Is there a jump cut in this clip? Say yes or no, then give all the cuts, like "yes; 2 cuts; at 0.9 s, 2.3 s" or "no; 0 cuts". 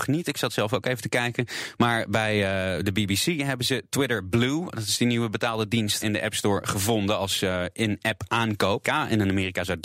yes; 2 cuts; at 6.0 s, 8.8 s